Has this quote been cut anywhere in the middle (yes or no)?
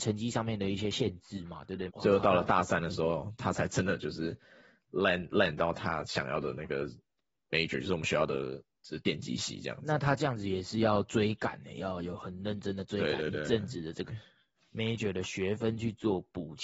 yes